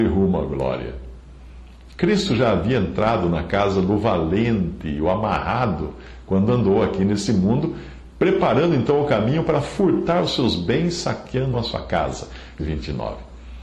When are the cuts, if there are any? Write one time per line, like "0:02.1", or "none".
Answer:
0:11.5
0:12.6